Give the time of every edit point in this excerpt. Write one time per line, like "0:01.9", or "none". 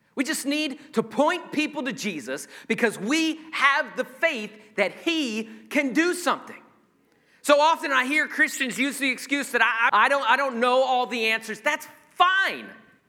0:09.9